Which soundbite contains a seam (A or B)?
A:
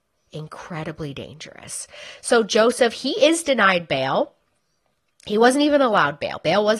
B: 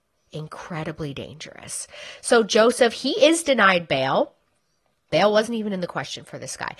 B